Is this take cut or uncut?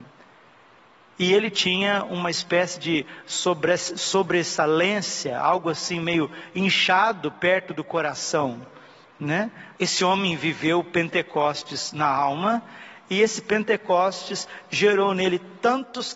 cut